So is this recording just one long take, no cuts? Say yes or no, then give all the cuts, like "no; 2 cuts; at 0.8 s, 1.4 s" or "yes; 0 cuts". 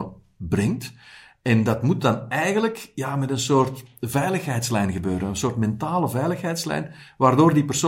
yes; 0 cuts